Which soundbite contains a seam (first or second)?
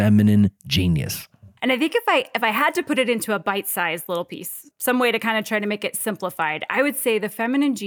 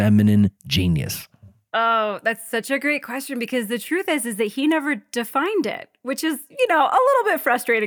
first